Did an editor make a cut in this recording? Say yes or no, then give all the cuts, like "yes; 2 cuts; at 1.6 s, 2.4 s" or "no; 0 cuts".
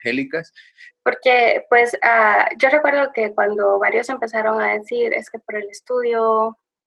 yes; 1 cut; at 0.9 s